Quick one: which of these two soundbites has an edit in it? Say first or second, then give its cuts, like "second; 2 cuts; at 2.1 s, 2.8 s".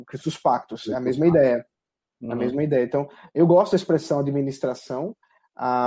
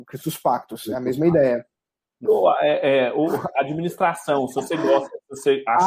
second; 1 cut; at 2.3 s